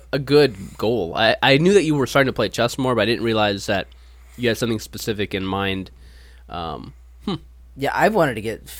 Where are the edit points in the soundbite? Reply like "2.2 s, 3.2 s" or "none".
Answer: none